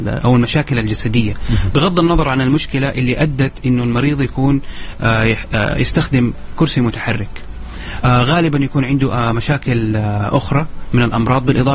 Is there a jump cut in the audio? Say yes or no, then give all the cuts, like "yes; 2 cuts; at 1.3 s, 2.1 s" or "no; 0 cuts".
no; 0 cuts